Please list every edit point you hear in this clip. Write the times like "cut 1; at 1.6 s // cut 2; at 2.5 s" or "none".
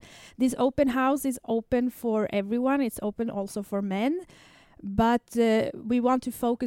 none